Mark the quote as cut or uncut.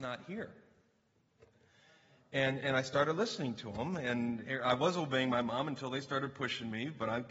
uncut